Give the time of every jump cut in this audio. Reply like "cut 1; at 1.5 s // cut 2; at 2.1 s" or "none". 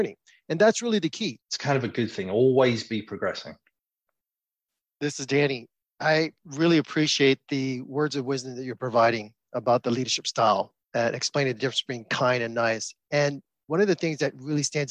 cut 1; at 1.4 s // cut 2; at 10.8 s